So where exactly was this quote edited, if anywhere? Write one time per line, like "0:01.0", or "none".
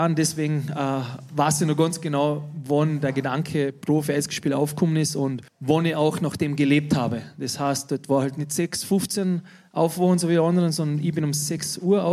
0:05.5